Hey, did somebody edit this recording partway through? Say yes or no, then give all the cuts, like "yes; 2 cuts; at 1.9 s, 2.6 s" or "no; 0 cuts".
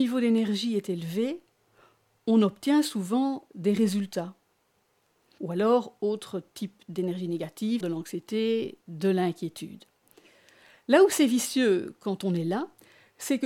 yes; 2 cuts; at 5.4 s, 7.8 s